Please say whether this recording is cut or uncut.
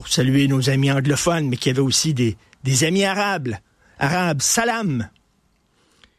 cut